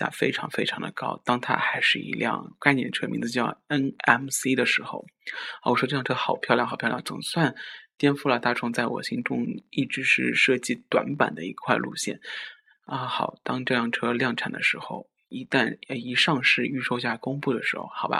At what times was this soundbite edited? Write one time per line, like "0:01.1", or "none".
none

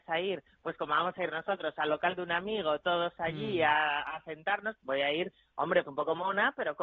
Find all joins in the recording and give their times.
0:04.8
0:05.8

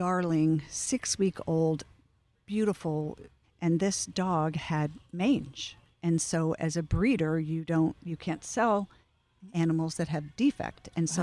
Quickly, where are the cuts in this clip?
0:03.4

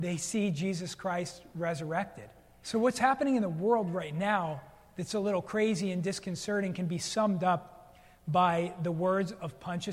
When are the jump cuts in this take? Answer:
0:02.6

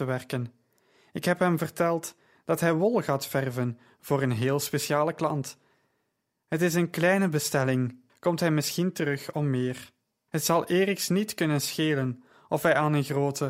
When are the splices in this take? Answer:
0:08.1
0:10.3

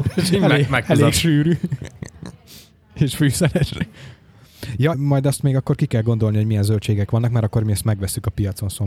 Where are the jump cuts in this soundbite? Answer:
0:04.9

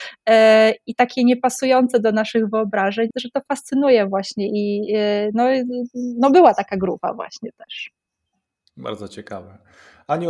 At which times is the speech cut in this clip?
0:03.1

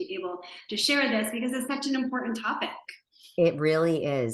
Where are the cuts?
none

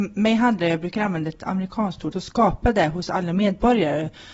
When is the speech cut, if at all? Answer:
0:02.1

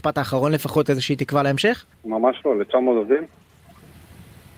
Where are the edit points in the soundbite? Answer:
0:01.9

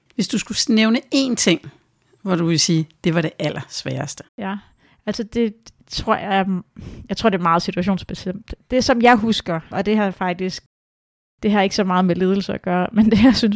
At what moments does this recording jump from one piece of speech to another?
0:04.3
0:09.7

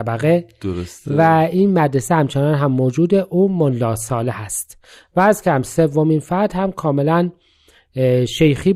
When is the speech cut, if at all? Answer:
none

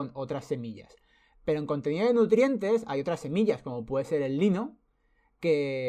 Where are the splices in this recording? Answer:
none

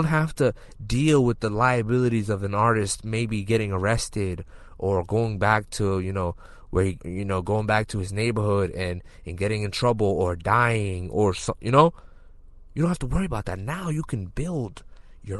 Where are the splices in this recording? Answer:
0:07.0

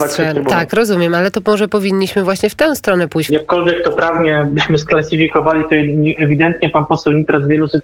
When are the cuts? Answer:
0:03.3

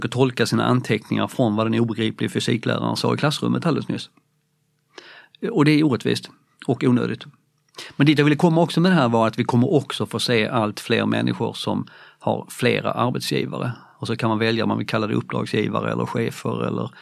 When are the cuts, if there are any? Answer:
none

